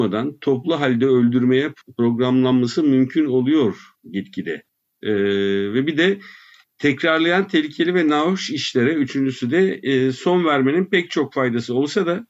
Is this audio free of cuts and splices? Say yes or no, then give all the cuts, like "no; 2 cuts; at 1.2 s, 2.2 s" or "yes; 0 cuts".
no; 1 cut; at 5.0 s